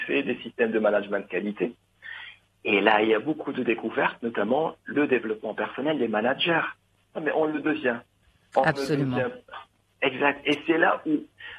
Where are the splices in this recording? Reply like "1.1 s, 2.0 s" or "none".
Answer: 7.1 s

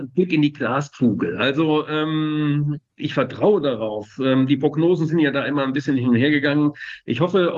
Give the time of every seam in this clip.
none

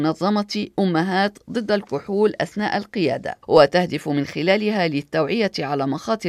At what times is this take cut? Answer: 3.4 s

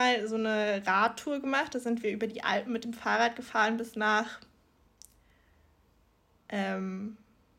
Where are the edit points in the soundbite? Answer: none

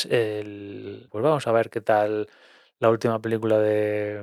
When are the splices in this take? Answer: 1.1 s

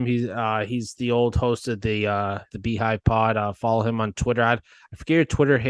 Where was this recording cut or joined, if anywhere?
2.5 s

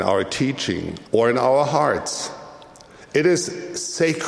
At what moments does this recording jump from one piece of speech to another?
1.0 s

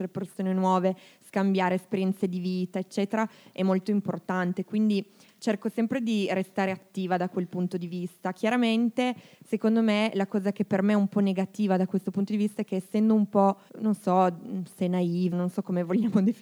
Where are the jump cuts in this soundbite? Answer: 13.7 s, 15.3 s

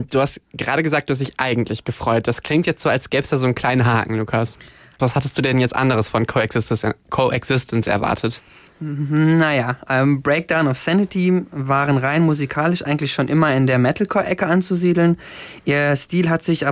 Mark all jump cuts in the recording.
5.0 s

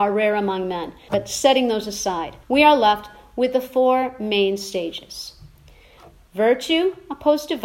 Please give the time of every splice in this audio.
1.1 s, 2.4 s

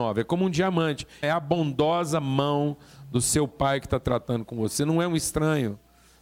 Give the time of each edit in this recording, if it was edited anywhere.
1.2 s

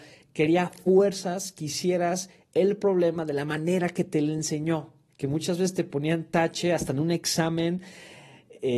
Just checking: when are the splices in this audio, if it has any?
5.1 s

